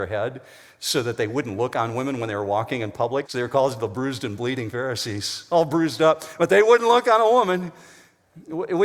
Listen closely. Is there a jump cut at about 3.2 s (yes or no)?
yes